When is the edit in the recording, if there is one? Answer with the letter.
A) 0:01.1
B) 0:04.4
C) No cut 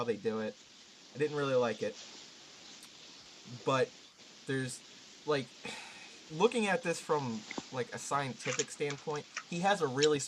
C